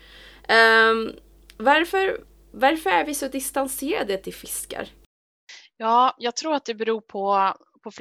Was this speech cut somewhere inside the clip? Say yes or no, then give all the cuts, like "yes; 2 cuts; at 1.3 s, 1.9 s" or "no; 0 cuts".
no; 0 cuts